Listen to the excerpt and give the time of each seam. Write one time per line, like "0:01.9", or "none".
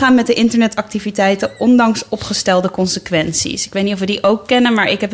none